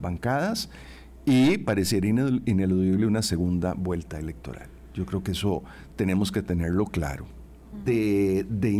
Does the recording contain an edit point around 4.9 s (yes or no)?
no